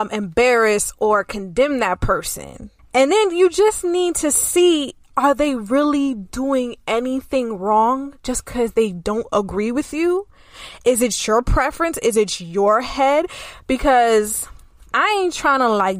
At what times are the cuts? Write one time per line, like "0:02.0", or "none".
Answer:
0:02.8